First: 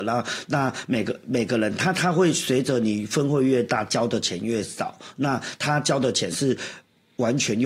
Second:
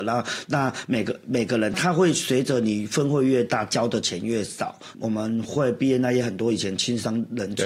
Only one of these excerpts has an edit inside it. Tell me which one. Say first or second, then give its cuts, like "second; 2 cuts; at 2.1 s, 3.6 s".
second; 2 cuts; at 1.7 s, 4.9 s